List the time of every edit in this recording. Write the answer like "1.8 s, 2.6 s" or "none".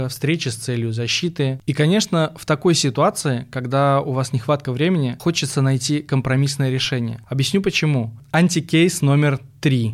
8.2 s